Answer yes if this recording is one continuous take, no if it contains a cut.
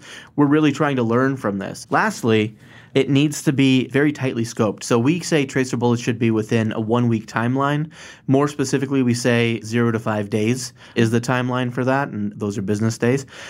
no